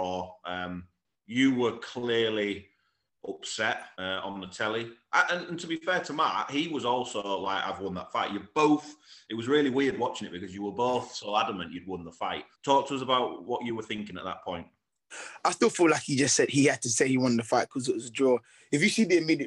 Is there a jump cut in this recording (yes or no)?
yes